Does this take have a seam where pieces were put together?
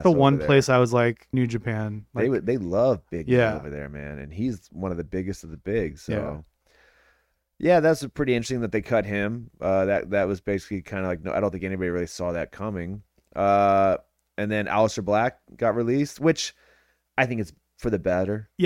yes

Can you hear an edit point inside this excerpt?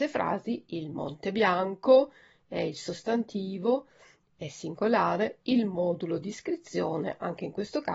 no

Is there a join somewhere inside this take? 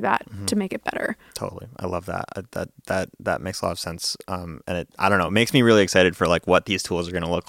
no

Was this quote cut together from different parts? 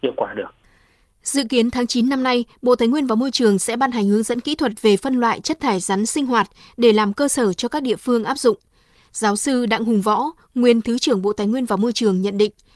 yes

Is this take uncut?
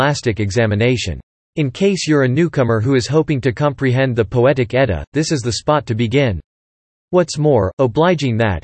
yes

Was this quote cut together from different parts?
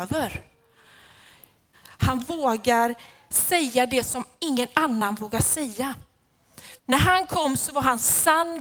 yes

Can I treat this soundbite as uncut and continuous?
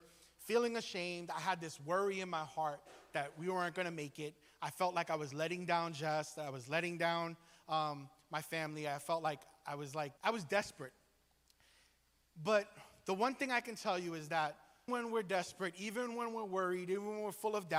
no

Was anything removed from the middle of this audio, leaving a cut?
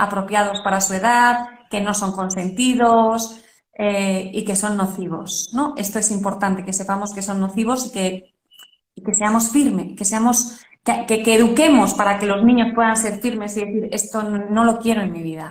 no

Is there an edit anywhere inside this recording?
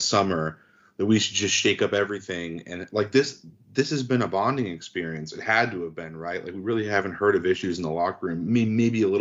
no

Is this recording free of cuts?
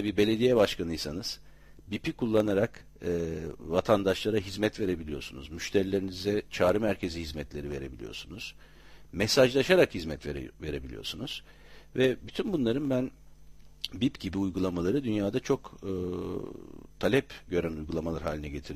yes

